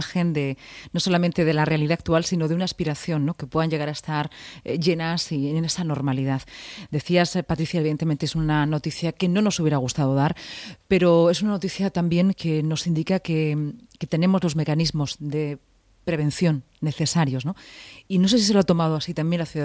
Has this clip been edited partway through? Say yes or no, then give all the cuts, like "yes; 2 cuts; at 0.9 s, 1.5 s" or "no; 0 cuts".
no; 0 cuts